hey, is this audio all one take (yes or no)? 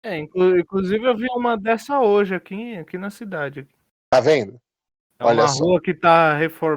yes